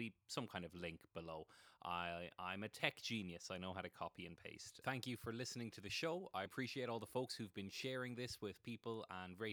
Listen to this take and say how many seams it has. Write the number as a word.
two